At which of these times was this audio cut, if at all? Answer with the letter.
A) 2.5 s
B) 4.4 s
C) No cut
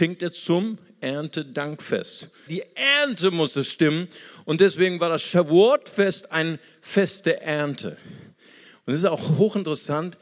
A